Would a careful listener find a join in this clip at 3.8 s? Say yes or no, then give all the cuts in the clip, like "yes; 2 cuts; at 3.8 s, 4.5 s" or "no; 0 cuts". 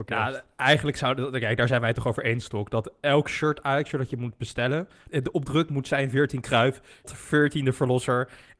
no; 2 cuts; at 5.1 s, 7.0 s